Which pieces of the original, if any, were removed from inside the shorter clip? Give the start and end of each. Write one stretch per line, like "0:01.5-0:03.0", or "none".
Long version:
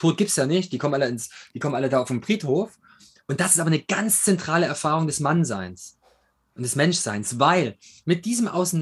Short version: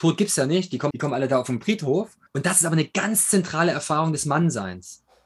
0:00.9-0:01.5
0:02.9-0:03.2